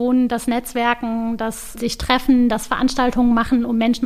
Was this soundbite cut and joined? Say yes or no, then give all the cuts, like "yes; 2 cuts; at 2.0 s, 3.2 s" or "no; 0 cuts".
yes; 1 cut; at 1.8 s